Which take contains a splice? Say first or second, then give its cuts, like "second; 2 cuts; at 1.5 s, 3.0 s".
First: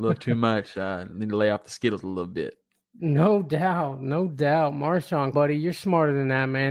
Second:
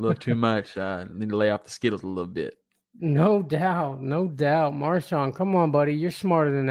first; 1 cut; at 5.3 s